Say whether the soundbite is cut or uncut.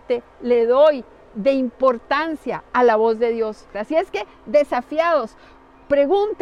cut